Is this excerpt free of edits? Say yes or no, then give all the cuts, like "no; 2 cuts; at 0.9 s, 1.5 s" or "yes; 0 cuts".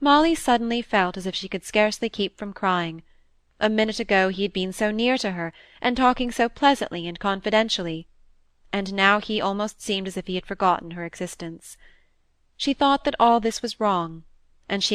yes; 0 cuts